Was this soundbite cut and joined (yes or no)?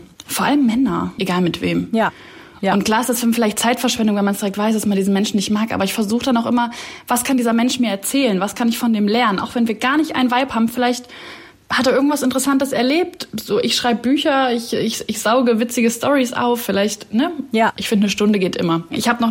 yes